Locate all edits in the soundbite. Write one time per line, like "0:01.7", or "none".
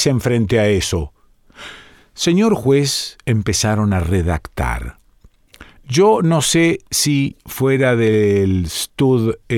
none